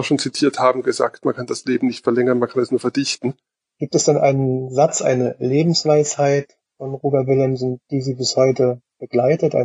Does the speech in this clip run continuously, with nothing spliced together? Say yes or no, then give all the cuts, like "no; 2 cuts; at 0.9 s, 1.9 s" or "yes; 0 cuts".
no; 1 cut; at 3.6 s